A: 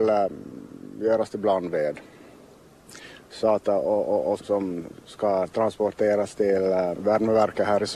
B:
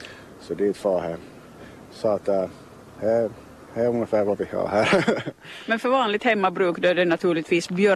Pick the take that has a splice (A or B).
A